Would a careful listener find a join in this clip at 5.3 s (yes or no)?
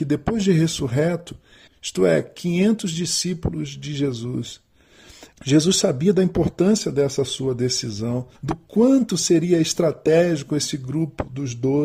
yes